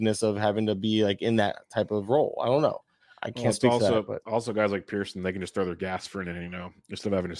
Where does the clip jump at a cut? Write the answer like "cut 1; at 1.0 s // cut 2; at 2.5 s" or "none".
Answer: none